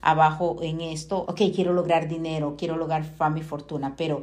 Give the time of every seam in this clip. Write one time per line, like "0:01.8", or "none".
0:01.2